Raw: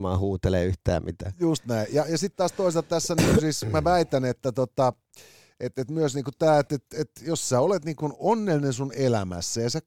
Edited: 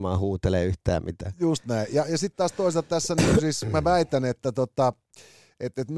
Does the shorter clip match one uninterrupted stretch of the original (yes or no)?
yes